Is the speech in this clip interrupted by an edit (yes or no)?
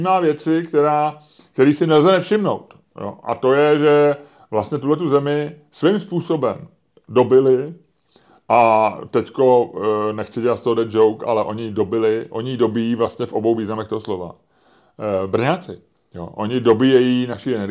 no